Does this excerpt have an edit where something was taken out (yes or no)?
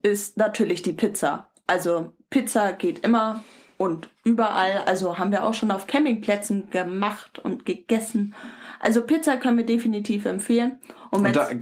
no